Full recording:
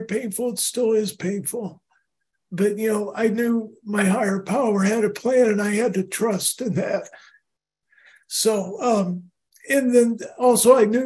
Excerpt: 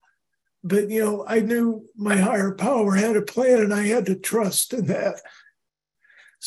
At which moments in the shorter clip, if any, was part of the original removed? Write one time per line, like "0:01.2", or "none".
none

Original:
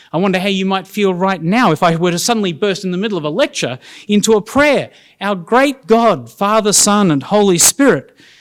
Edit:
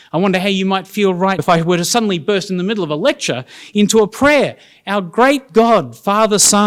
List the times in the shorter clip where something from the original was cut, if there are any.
0:01.4

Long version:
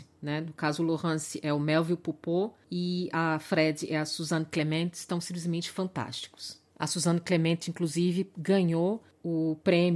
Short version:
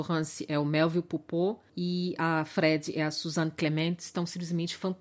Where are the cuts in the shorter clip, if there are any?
none

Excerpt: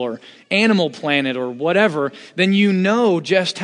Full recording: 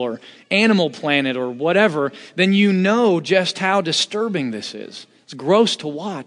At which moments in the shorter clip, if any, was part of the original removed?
none

